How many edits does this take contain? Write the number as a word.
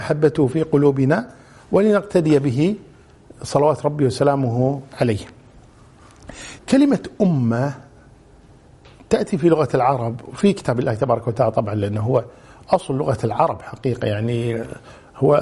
one